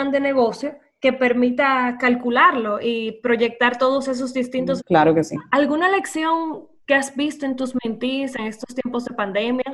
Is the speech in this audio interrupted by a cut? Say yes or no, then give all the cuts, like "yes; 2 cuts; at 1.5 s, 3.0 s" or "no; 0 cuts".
yes; 1 cut; at 4.8 s